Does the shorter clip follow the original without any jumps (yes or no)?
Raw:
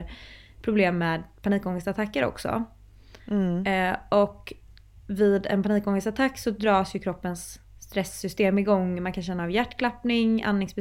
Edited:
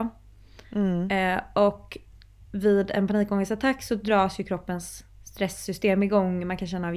yes